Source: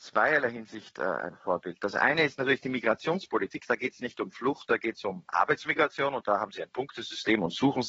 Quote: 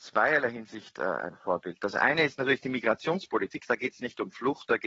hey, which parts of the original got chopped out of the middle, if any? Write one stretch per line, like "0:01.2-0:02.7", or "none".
none